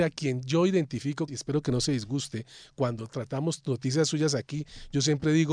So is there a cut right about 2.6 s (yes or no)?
no